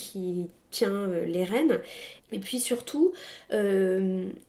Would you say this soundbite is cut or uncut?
cut